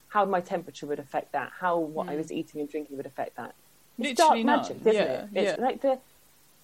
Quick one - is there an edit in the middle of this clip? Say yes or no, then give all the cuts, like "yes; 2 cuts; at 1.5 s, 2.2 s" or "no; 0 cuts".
yes; 2 cuts; at 3.8 s, 5.6 s